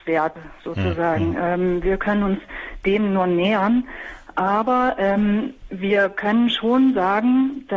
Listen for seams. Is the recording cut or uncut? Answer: uncut